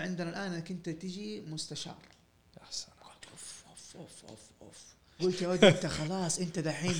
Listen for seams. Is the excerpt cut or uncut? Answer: cut